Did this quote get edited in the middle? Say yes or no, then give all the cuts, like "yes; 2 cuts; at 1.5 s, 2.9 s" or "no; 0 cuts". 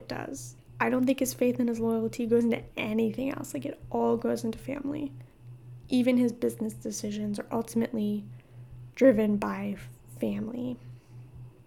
no; 0 cuts